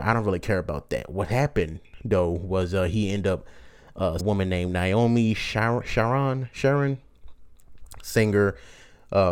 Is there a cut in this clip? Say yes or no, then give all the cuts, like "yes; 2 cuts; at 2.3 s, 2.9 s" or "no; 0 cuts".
yes; 1 cut; at 4.2 s